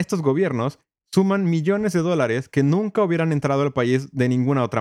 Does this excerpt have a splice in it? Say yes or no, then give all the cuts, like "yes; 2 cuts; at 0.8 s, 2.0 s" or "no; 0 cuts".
no; 0 cuts